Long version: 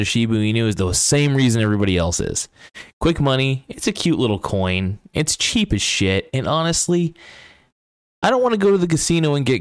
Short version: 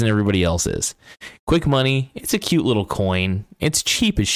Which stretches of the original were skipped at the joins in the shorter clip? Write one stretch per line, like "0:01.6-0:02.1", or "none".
none